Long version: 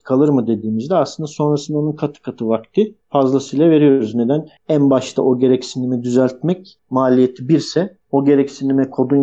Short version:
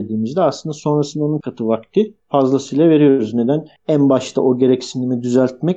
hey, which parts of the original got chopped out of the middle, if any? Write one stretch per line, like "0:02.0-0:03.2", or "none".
0:01.9-0:02.2